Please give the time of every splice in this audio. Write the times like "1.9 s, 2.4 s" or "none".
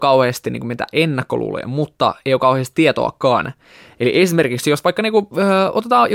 none